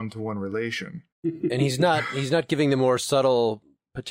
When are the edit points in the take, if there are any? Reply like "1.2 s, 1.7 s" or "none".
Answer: 1.1 s